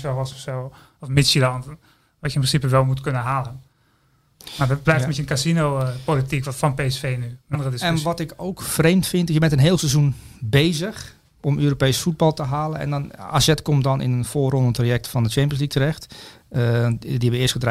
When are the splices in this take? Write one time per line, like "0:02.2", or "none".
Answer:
0:07.5

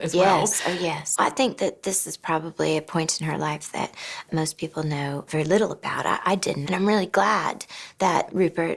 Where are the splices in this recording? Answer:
0:01.1
0:06.7

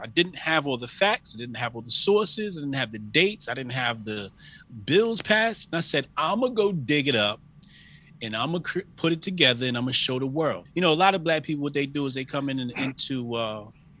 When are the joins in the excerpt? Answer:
0:10.7

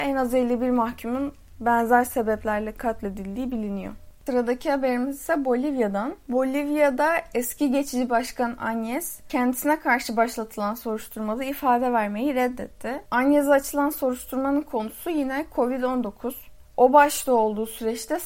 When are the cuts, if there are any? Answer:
none

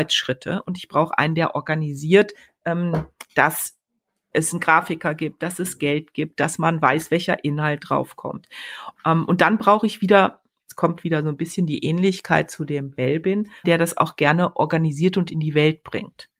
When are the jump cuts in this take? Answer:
0:09.0
0:13.6

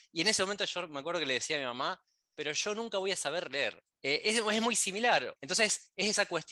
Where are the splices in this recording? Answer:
0:04.0
0:05.4

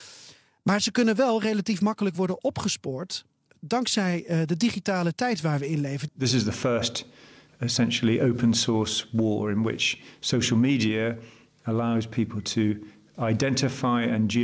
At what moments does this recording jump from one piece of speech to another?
0:06.1

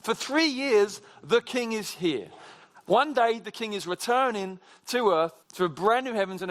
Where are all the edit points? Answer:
0:05.4

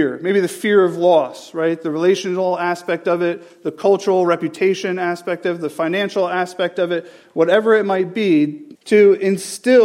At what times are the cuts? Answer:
0:08.7

